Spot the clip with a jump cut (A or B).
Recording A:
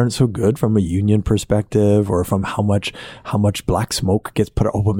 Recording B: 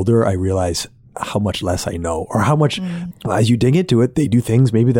B